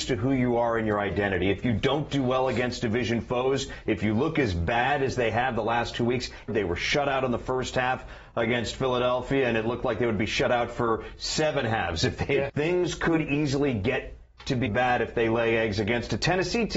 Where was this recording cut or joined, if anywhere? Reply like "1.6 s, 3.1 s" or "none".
6.5 s, 12.5 s, 14.7 s